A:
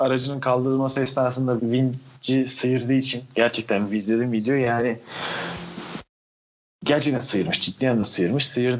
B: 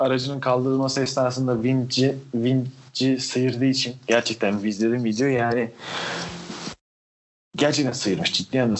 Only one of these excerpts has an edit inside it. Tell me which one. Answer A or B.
A